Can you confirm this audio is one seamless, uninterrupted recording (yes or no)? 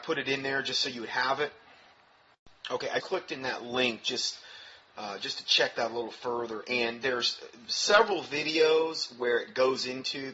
no